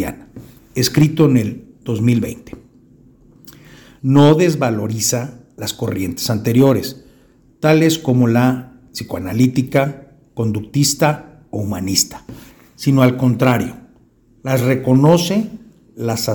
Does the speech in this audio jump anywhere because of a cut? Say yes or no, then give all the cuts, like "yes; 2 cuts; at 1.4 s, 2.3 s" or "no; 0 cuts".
yes; 1 cut; at 4.0 s